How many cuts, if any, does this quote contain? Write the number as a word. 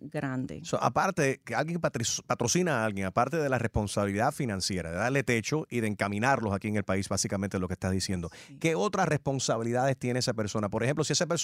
zero